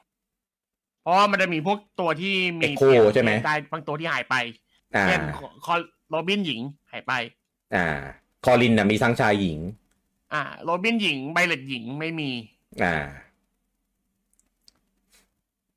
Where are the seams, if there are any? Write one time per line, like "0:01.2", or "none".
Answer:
0:06.8